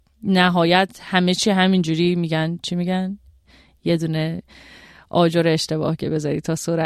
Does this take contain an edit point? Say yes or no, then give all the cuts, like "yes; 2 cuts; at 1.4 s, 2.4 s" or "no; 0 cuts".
no; 0 cuts